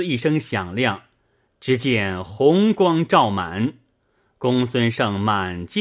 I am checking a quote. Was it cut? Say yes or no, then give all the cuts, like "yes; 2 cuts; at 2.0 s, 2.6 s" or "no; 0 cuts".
no; 0 cuts